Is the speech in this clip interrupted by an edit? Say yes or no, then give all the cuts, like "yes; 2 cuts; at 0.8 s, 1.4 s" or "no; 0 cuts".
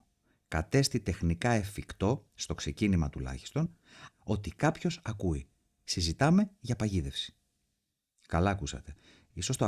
yes; 1 cut; at 4.1 s